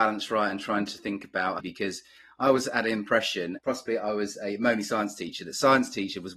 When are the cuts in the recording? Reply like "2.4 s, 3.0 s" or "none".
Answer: 1.6 s, 3.6 s